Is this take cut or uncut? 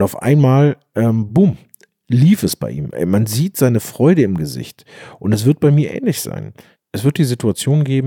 uncut